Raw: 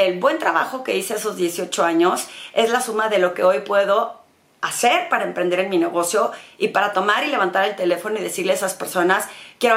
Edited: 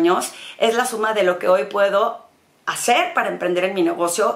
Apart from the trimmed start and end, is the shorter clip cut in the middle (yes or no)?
no